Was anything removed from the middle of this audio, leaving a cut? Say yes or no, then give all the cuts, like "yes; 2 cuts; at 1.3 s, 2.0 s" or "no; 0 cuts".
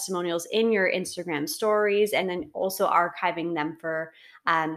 no; 0 cuts